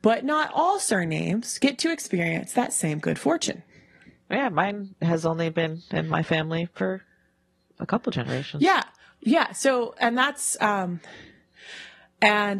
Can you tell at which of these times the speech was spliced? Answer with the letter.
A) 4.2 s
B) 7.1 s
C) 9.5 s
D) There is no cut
D